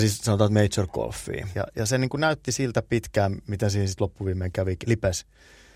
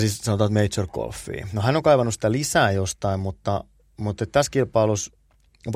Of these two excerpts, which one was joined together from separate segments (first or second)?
first